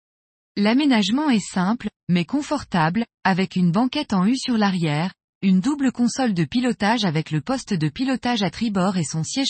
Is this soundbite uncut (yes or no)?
yes